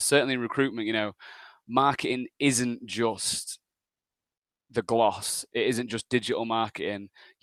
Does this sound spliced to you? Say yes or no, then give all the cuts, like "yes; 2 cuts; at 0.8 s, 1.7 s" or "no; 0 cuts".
no; 0 cuts